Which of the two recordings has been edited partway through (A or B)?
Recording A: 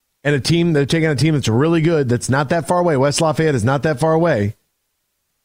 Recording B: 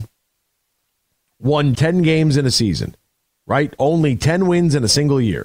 B